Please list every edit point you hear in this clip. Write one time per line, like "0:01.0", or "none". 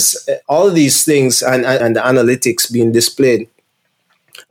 0:01.8